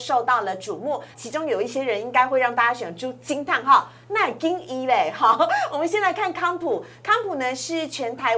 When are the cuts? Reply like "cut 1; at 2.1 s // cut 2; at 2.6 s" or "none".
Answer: cut 1; at 1.1 s